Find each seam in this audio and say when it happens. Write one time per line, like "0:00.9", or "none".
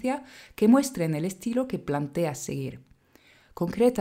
none